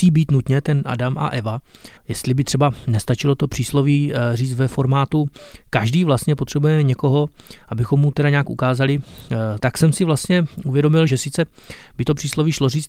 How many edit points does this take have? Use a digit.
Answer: 3